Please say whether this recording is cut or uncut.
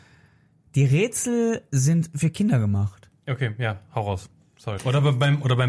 cut